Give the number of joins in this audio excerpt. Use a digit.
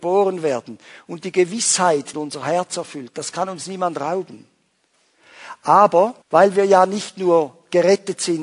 2